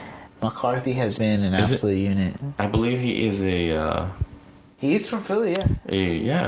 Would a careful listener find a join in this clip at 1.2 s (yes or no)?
yes